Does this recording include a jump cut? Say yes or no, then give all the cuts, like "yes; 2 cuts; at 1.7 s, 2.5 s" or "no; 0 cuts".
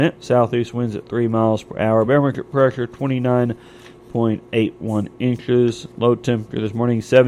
no; 0 cuts